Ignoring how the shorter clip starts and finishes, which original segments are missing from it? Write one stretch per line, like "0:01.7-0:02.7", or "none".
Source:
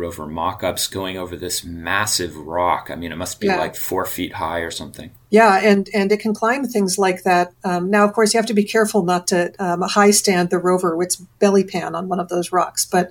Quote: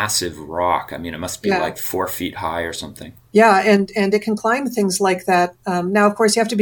none